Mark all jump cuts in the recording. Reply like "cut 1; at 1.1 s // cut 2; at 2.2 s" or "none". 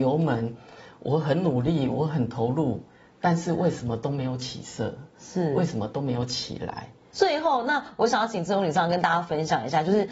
cut 1; at 7.1 s